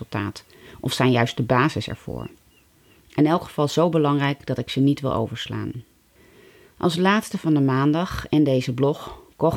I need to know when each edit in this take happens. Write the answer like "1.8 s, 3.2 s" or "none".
none